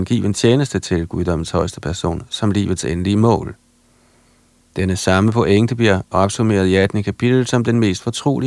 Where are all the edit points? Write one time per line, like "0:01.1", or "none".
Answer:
none

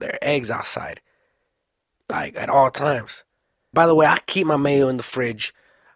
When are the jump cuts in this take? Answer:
0:03.7

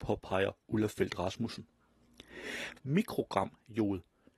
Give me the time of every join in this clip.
0:02.7

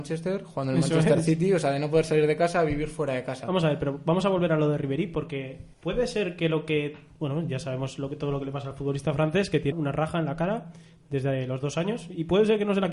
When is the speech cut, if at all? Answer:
0:05.7
0:09.7

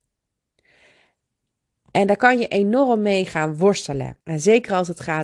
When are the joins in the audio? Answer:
0:04.2

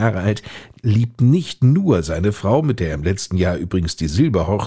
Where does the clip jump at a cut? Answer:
none

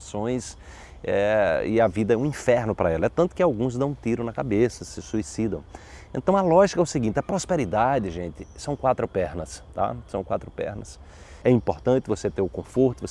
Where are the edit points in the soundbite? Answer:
0:11.4

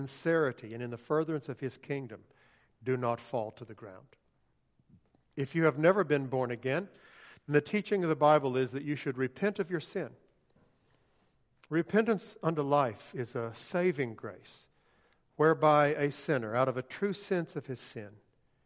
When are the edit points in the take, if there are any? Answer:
none

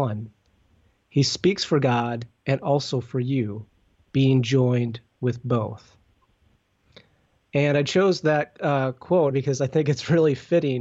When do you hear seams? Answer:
0:09.3

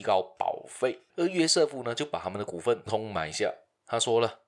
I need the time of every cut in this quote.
0:01.1
0:02.9

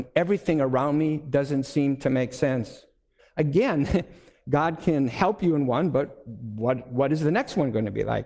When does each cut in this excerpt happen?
0:03.2

